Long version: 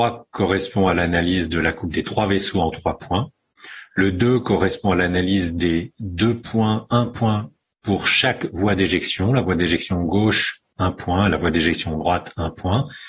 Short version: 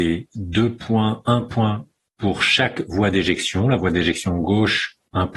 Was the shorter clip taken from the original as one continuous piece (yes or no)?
yes